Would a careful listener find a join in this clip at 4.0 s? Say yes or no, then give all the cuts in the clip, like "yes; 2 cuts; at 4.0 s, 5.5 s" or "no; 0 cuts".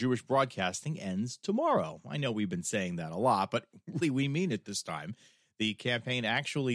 yes; 1 cut; at 4.0 s